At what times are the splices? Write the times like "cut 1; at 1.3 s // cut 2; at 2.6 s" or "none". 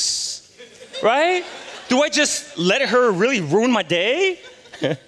none